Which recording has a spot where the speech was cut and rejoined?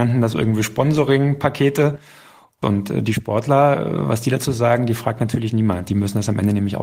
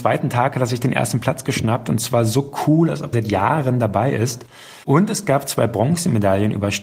second; 2 cuts; at 3.1 s, 4.8 s

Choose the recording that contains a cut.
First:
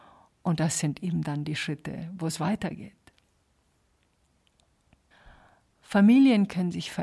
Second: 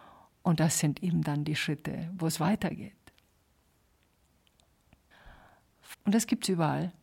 second; 1 cut; at 5.9 s

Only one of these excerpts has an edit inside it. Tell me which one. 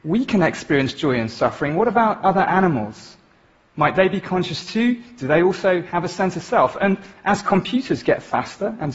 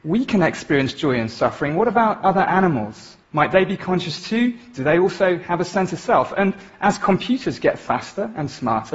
second; 1 cut; at 3.2 s

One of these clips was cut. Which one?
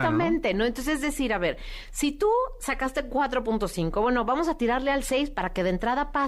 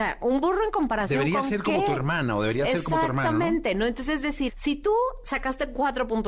second; 1 cut; at 4.5 s

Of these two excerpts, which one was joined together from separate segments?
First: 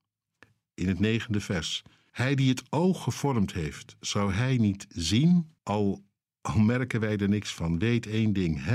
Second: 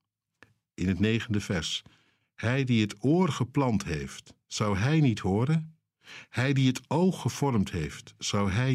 first; 2 cuts; at 2.1 s, 5.6 s

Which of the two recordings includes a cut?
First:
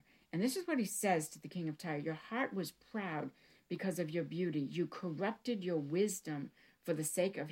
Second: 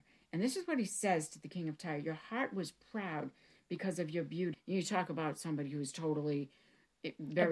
second; 1 cut; at 4.5 s

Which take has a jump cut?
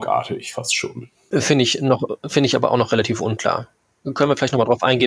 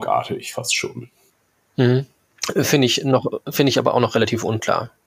first; 1 cut; at 1.3 s

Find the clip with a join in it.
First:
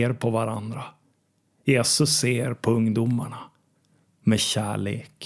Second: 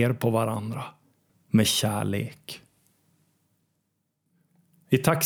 second; 1 cut; at 1.3 s

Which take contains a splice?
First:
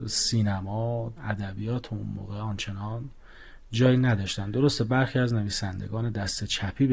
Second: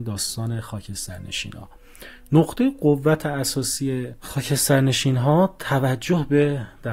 first; 1 cut; at 1.2 s

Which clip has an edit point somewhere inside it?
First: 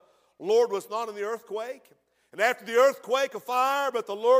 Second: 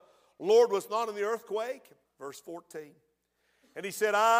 second; 1 cut; at 2.0 s

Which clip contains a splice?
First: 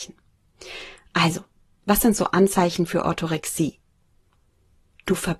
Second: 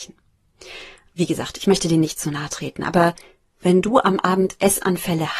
second; 1 cut; at 1.1 s

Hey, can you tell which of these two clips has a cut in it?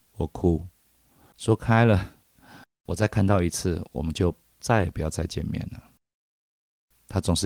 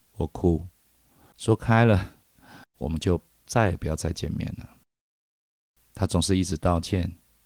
second; 1 cut; at 2.7 s

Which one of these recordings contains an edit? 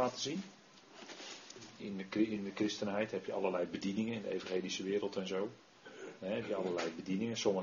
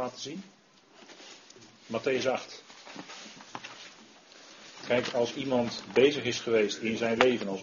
first; 1 cut; at 1.8 s

